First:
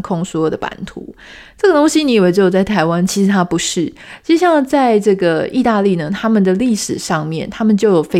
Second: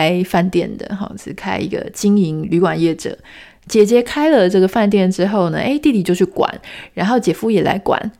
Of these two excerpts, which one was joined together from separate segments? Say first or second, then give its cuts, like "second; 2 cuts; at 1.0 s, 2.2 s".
first; 1 cut; at 3.1 s